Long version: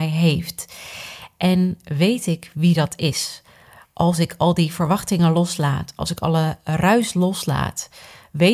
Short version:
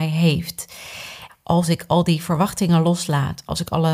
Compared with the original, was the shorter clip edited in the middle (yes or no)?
yes